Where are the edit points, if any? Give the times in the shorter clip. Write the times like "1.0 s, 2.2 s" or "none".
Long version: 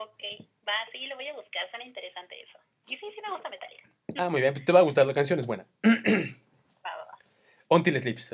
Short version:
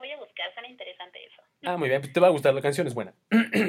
1.6 s